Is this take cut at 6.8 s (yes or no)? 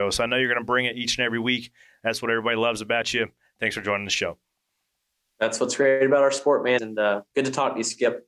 yes